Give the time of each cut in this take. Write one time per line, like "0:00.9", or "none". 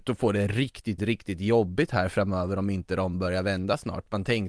0:01.0